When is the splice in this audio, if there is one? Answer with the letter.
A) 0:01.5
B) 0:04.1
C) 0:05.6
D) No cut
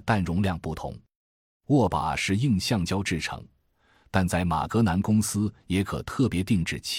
D